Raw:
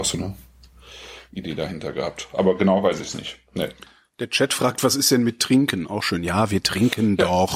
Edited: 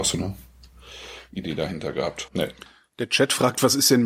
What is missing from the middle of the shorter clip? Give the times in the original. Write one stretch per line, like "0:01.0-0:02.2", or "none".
0:02.3-0:03.5